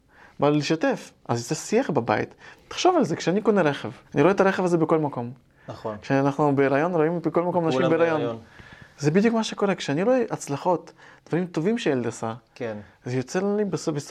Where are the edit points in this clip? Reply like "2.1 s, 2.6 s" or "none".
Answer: 2.5 s, 4.0 s